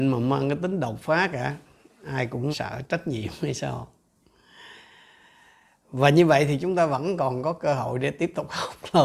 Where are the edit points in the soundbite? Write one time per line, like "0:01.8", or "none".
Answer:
0:02.5